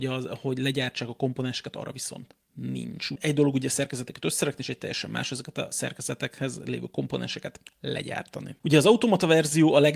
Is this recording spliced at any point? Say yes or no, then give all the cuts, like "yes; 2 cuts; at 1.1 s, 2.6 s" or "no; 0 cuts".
no; 0 cuts